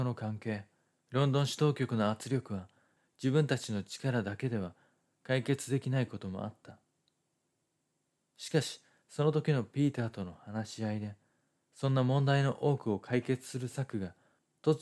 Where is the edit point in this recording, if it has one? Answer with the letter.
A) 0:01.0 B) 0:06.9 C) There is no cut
A